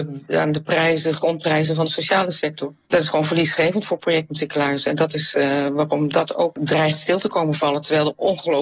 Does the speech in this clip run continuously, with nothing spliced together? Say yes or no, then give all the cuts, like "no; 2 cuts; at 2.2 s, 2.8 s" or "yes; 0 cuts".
yes; 0 cuts